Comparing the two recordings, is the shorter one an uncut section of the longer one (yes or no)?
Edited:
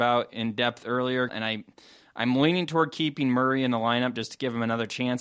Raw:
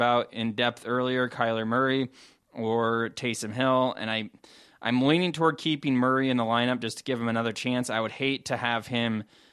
no